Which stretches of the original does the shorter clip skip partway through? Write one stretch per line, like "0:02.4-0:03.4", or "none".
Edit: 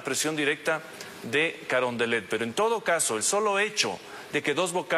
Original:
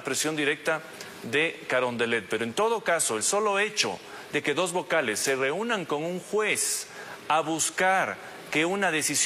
none